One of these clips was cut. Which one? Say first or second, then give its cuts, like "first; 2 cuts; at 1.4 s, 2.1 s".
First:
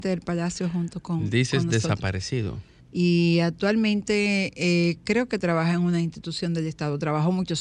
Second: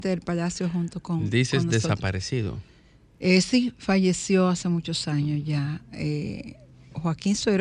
first; 1 cut; at 2.8 s